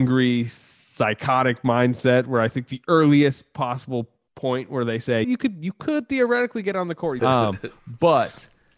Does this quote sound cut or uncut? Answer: cut